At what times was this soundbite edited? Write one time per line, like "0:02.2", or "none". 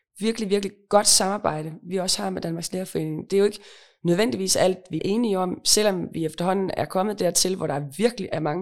0:05.0